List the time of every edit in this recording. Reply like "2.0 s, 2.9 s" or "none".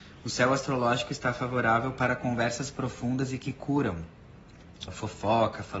4.9 s